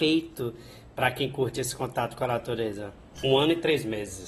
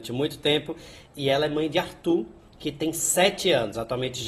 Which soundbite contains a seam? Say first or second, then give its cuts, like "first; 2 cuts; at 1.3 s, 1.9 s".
first; 1 cut; at 3.2 s